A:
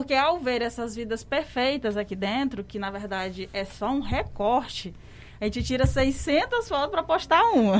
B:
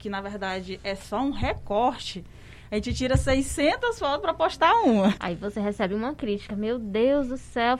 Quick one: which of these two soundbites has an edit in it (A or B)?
B